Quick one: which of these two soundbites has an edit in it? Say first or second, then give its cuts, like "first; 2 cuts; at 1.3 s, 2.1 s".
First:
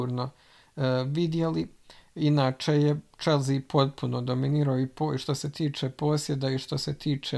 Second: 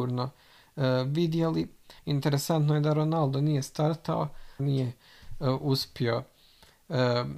second; 2 cuts; at 2.0 s, 4.6 s